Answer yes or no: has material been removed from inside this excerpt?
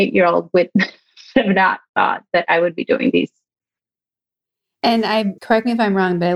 yes